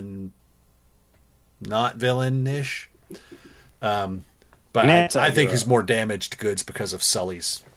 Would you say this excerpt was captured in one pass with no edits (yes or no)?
yes